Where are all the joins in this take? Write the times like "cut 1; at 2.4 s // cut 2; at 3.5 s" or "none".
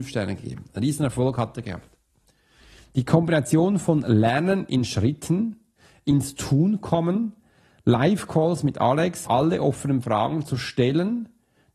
cut 1; at 9.2 s